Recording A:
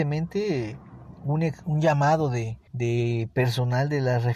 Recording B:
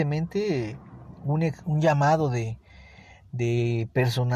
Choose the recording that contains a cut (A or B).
A